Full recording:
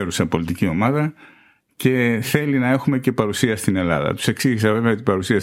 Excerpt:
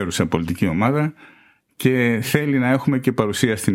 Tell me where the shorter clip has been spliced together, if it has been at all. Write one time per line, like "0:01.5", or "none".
none